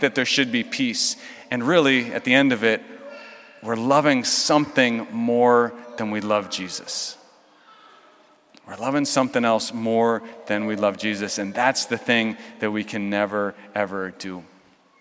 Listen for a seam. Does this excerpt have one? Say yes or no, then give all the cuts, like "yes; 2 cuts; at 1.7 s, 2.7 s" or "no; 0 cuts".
no; 0 cuts